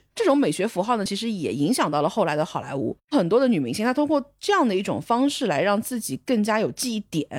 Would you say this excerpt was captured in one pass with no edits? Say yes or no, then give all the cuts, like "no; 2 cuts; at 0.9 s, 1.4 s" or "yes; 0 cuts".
yes; 0 cuts